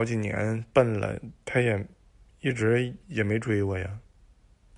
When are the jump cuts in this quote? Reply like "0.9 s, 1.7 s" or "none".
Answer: 3.0 s